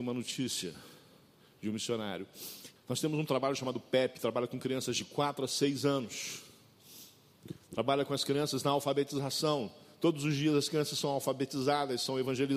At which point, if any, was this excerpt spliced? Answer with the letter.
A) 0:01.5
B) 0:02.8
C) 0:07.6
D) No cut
B